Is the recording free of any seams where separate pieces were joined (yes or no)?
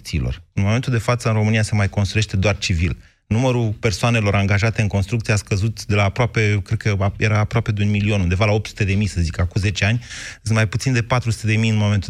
yes